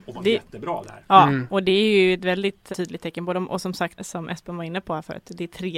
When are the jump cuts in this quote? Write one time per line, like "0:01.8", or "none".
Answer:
0:02.7
0:04.0